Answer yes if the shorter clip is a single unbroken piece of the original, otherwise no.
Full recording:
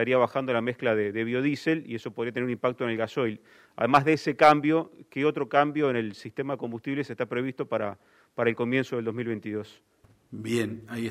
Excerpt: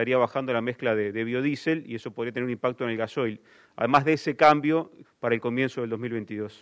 no